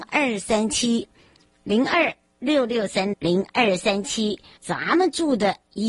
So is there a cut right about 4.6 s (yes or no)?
yes